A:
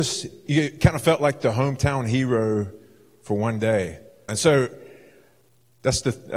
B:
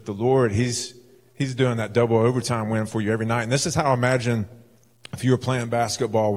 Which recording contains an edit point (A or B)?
A